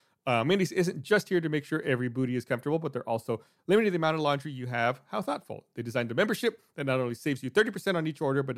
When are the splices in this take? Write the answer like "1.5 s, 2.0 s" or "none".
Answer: none